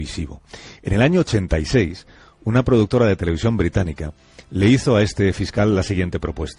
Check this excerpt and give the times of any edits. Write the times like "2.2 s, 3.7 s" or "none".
none